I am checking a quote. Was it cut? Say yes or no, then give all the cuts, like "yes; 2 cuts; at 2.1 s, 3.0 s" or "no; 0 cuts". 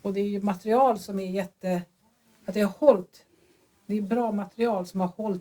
no; 0 cuts